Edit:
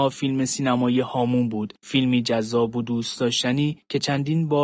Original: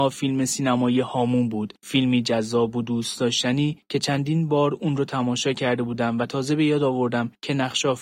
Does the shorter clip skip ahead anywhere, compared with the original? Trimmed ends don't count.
no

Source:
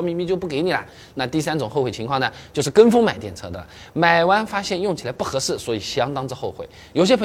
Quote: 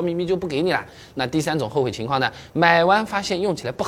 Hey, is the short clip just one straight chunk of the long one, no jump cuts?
no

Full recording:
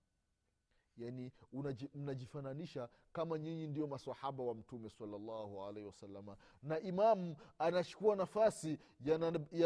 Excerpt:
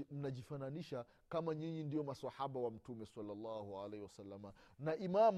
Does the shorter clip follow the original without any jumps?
yes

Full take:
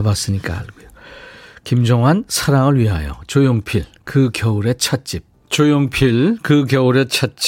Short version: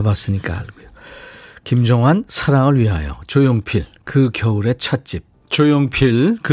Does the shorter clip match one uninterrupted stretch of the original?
yes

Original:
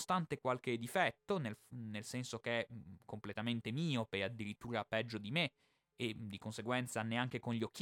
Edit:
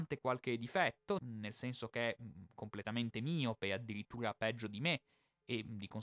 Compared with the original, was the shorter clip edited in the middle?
yes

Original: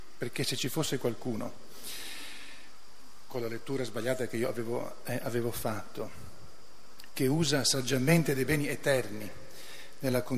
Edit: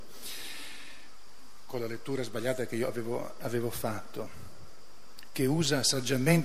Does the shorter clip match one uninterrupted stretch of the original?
no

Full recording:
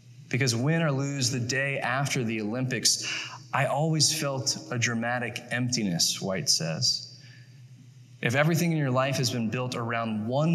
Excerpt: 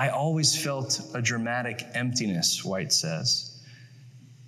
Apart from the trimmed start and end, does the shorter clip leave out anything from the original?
no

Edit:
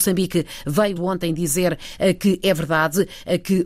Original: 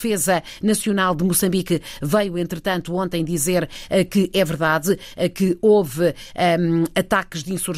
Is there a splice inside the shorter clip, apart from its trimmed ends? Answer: yes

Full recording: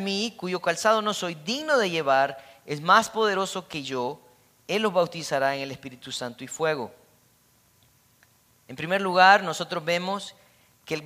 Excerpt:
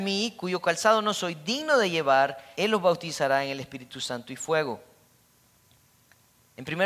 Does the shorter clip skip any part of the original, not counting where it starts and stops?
yes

